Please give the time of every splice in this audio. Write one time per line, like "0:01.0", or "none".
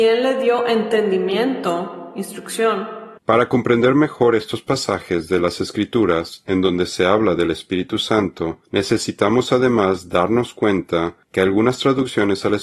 0:03.2